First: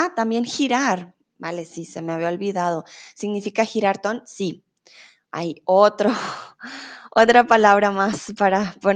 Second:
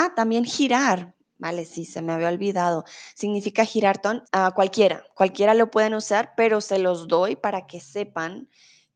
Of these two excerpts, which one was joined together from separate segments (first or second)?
second